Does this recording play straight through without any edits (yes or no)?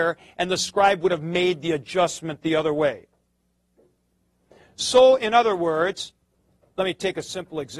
yes